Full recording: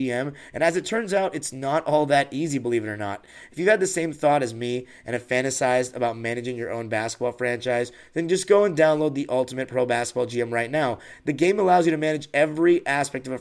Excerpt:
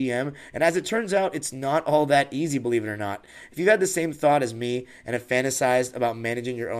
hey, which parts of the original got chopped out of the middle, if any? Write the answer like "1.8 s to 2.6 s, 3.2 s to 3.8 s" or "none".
none